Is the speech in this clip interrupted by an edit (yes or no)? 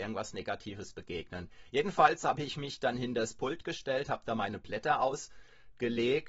no